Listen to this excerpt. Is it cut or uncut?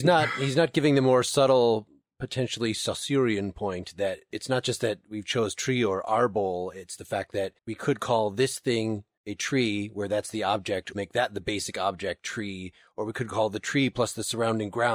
cut